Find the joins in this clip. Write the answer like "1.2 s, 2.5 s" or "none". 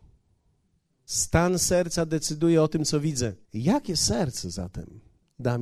1.1 s, 3.4 s